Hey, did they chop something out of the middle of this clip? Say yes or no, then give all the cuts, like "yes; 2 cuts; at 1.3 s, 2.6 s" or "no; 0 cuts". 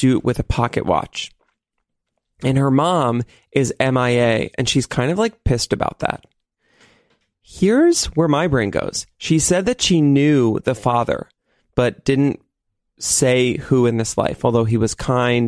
no; 0 cuts